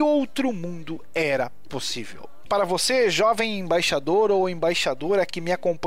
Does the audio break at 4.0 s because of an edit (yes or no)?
no